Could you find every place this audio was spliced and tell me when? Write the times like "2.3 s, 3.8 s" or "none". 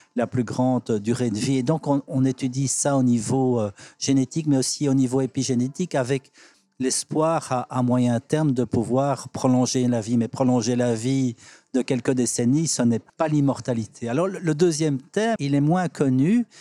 13.1 s, 15.4 s

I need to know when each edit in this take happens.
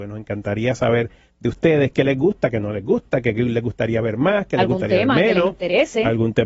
none

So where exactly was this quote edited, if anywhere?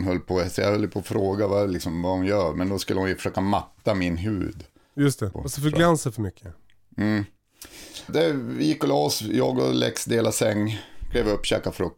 5.3 s, 8.1 s

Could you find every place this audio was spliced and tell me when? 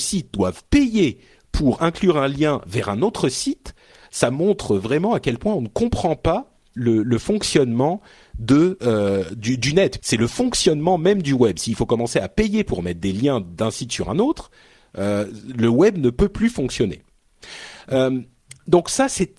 6.8 s, 10.0 s

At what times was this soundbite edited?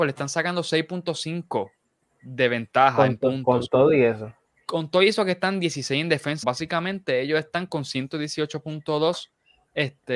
6.4 s

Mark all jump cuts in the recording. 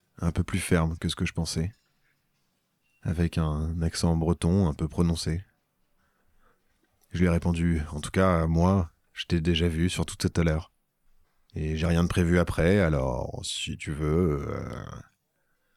none

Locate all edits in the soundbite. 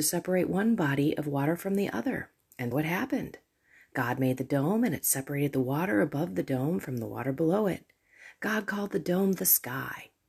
2.7 s

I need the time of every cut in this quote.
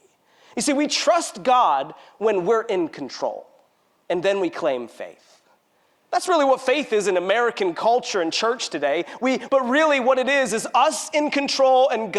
9.5 s

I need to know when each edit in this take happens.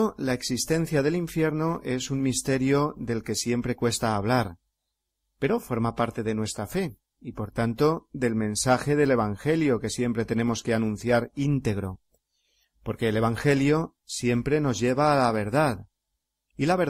none

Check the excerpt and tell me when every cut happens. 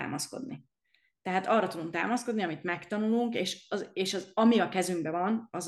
none

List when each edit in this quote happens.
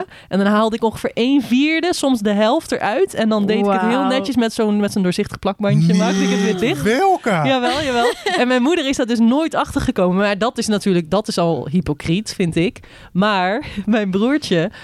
none

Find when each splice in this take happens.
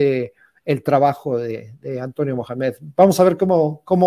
1.8 s

